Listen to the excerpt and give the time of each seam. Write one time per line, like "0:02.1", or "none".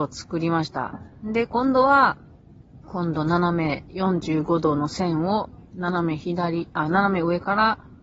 0:02.8